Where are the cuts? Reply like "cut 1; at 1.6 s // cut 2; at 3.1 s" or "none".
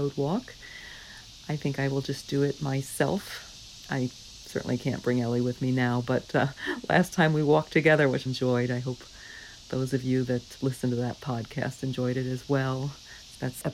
cut 1; at 8.3 s // cut 2; at 10.6 s